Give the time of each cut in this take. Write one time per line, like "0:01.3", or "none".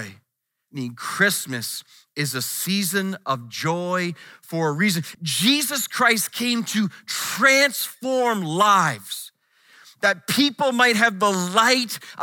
0:05.1